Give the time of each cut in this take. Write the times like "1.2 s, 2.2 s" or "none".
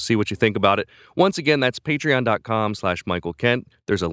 none